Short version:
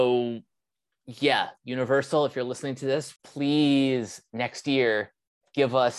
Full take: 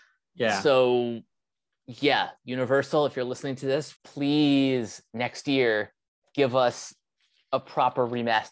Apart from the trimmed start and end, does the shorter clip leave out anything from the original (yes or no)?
no